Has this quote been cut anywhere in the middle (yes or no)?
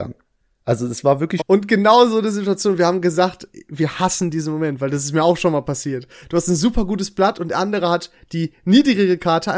yes